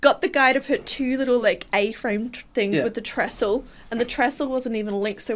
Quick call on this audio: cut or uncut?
uncut